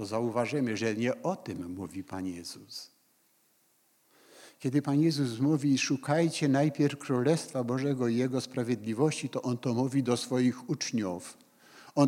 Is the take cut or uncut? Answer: uncut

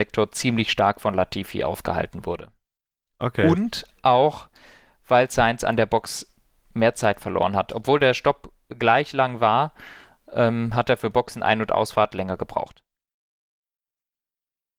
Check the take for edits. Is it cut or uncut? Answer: uncut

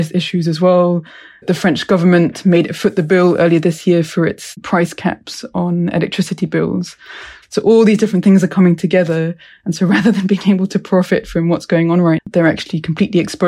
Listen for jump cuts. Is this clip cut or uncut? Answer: cut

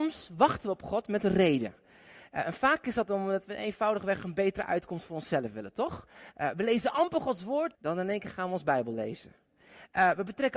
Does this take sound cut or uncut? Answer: cut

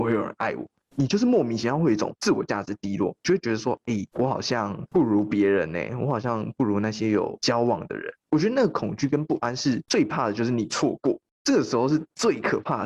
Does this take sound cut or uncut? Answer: cut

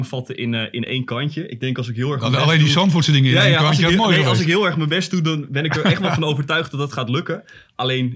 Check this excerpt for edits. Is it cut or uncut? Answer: uncut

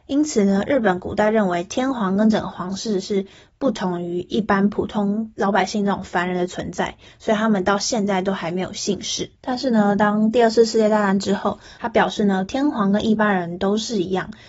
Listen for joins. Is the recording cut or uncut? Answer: cut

